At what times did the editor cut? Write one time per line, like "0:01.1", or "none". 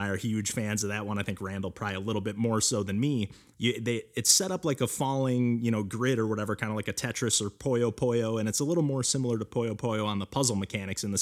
0:03.5